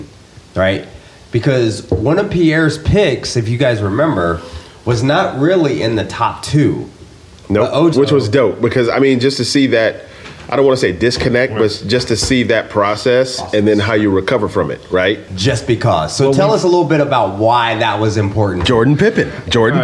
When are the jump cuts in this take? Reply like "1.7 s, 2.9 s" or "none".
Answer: 7.9 s, 15.3 s